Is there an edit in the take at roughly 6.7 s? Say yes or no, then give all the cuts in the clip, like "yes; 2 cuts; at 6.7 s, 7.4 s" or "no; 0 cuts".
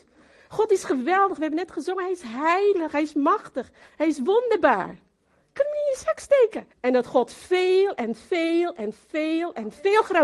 yes; 1 cut; at 6.7 s